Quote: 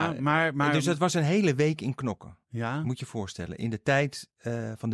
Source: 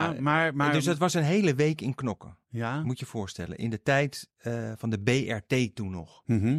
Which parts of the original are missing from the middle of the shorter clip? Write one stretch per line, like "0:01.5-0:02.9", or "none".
none